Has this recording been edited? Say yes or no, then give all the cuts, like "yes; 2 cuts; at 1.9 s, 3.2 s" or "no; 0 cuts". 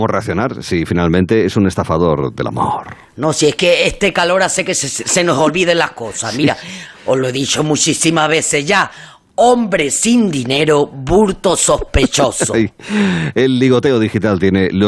no; 0 cuts